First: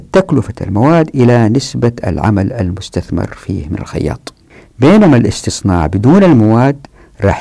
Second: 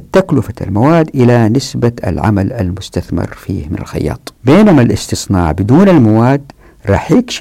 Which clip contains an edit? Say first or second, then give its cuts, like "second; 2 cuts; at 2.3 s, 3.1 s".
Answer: second; 1 cut; at 4.4 s